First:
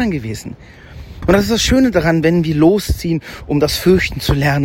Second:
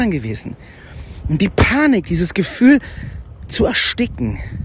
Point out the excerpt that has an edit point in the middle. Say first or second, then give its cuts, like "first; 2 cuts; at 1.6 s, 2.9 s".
first; 1 cut; at 1.2 s